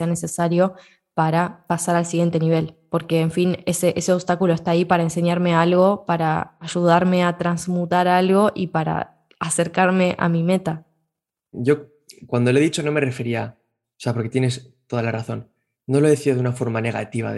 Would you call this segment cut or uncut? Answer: cut